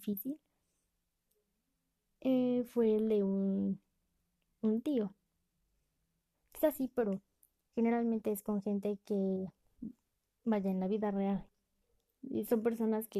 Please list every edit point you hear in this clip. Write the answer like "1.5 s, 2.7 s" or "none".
6.3 s